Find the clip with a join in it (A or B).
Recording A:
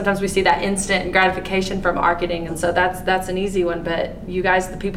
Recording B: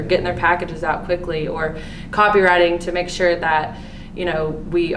A